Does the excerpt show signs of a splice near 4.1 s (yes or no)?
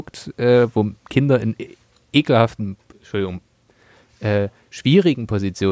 no